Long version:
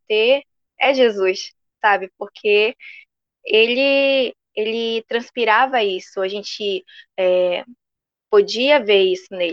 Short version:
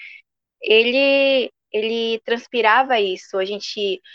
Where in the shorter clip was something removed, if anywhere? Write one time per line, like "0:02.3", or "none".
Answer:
none